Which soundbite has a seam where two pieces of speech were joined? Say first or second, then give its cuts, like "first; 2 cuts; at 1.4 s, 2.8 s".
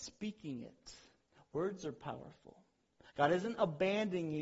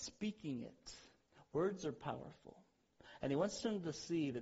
first; 1 cut; at 3.1 s